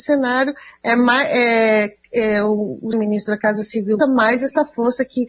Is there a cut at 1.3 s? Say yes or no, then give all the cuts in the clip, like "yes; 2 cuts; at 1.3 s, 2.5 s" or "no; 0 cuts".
no; 2 cuts; at 2.9 s, 4.0 s